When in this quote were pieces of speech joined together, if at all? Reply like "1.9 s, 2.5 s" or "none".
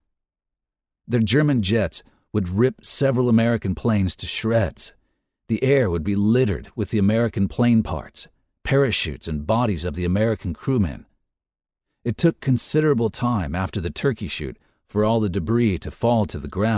1.0 s

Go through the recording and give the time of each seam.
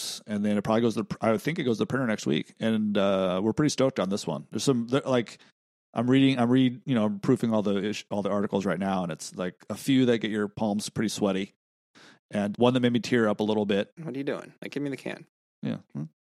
12.5 s, 14.0 s

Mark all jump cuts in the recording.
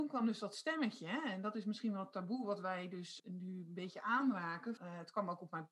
3.2 s, 4.8 s

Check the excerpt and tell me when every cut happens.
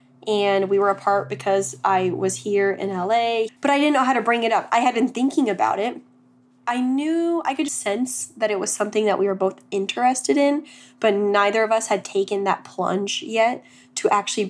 3.5 s, 7.7 s

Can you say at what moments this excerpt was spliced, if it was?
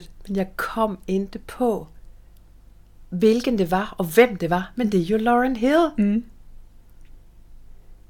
none

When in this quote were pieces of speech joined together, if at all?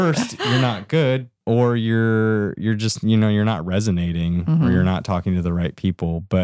1.4 s

